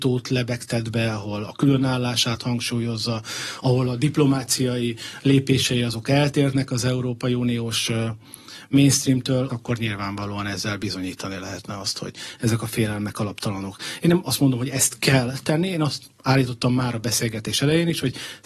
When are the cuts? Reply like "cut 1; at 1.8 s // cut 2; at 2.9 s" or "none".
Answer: cut 1; at 9.5 s